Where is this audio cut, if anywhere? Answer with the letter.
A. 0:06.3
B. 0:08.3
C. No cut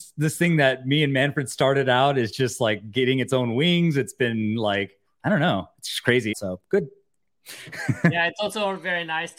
A